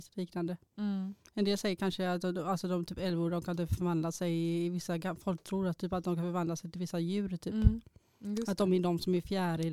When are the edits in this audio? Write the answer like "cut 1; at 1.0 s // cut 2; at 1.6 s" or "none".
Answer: none